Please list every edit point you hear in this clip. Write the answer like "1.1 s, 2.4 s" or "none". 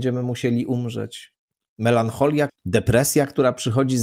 2.5 s